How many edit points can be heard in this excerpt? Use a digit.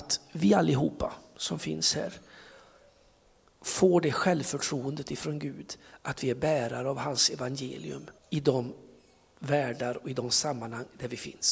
1